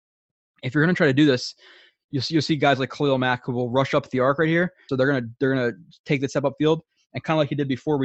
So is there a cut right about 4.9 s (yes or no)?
yes